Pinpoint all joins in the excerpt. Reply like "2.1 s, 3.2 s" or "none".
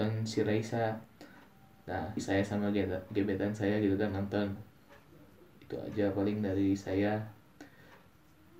2.2 s, 4.6 s